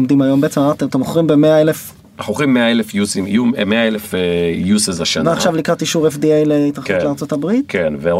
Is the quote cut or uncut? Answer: uncut